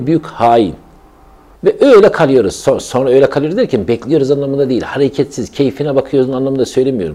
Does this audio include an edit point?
yes; 1 cut; at 1.6 s

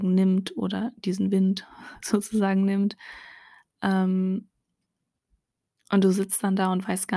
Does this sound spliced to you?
no; 0 cuts

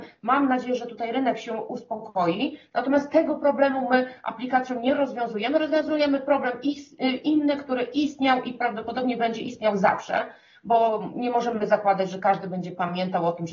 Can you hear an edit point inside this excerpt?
no; 0 cuts

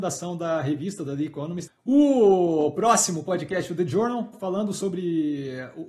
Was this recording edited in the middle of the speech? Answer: yes; 2 cuts; at 1.7 s, 4.3 s

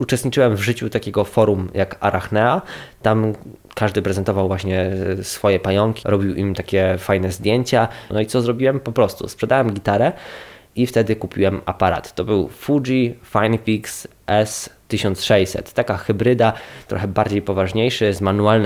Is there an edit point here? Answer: yes; 3 cuts; at 6.0 s, 8.1 s, 16.9 s

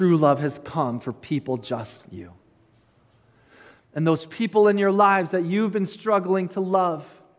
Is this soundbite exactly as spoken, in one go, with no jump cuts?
no; 1 cut; at 2.0 s

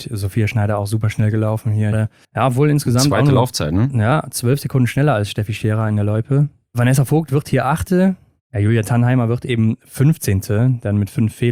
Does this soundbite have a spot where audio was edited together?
yes; 1 cut; at 1.9 s

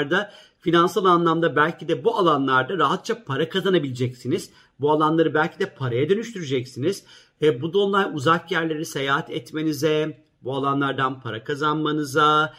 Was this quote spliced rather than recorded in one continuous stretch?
no; 0 cuts

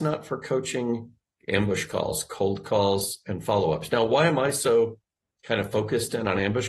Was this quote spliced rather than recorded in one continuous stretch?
no; 0 cuts

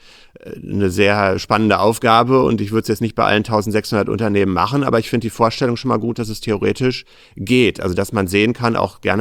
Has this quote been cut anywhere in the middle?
no; 0 cuts

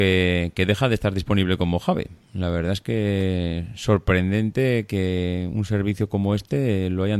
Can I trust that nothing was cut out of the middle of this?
yes; 0 cuts

